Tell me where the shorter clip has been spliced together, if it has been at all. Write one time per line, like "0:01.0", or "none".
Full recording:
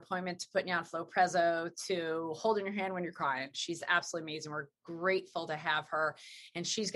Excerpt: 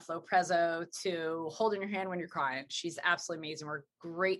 none